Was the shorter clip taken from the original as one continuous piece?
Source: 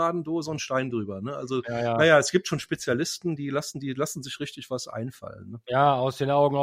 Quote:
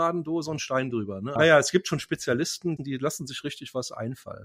no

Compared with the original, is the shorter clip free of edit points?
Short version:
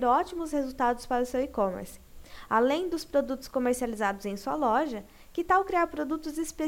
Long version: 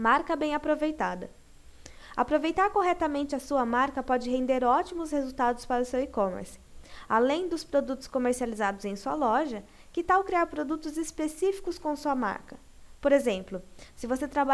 yes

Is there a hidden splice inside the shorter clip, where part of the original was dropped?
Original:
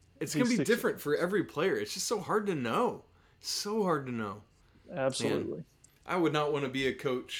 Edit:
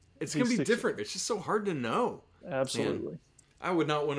yes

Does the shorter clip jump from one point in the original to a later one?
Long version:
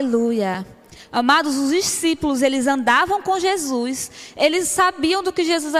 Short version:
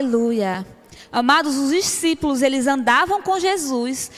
no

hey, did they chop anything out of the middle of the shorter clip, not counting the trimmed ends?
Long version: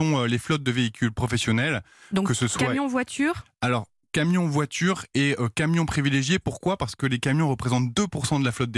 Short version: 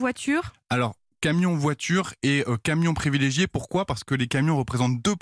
no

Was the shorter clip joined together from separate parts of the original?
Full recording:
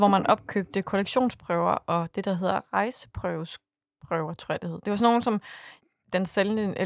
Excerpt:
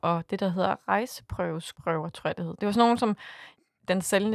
yes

